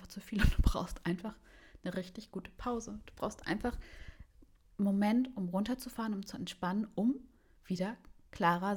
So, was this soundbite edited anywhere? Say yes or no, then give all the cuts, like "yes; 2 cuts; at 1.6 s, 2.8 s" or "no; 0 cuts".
no; 0 cuts